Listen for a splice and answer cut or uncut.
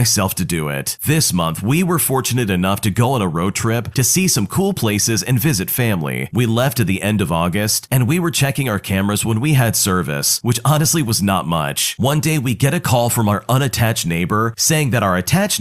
uncut